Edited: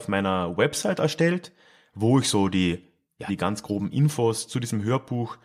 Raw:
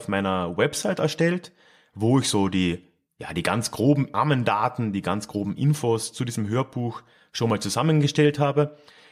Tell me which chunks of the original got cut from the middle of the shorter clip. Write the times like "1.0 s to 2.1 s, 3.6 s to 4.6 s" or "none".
3.3 s to 4.9 s

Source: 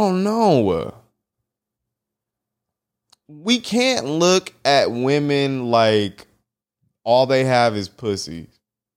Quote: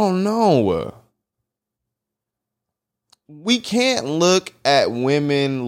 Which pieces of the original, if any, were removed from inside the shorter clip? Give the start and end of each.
none

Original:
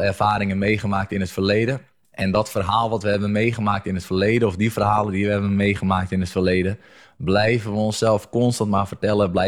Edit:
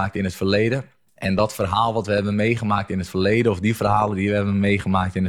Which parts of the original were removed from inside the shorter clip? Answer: none

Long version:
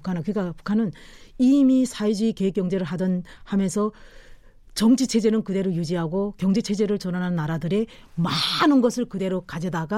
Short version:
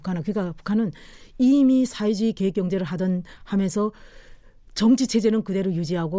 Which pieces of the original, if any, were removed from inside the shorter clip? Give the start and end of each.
none

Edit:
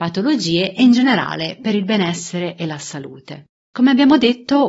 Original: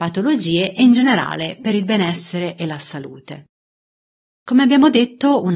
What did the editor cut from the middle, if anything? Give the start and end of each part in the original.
3.6 s to 4.3 s

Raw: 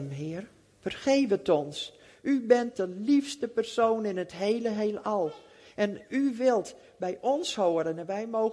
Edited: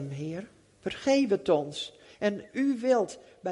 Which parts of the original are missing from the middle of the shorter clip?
2.0 s to 5.6 s

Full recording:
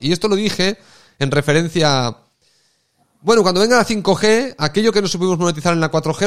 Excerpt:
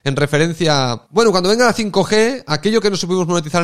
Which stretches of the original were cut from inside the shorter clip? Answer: 2.2 s to 3.2 s

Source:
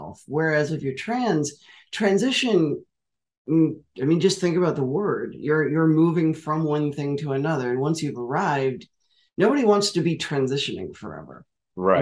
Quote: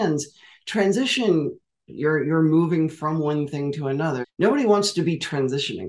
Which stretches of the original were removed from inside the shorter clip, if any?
3.1 s to 5.3 s, 7.7 s to 9.2 s

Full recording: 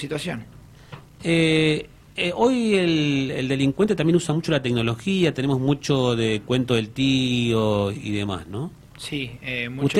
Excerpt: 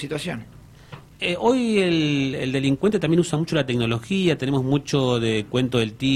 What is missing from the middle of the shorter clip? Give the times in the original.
1.1 s to 2.1 s

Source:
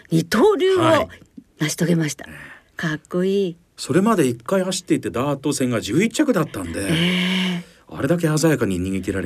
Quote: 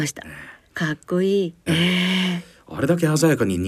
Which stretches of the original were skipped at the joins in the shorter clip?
3.7 s to 6.9 s

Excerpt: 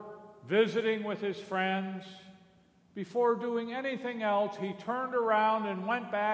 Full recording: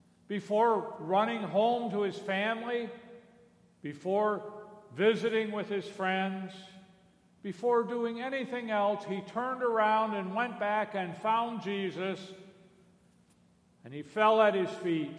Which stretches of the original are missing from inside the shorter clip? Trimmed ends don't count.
none

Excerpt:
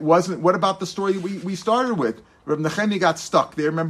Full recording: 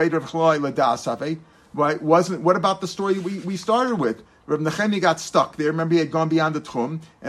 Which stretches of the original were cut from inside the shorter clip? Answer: none

